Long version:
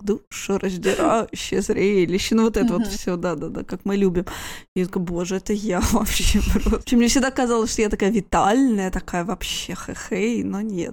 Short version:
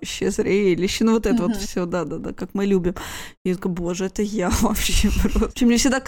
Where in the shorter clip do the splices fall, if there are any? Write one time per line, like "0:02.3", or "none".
none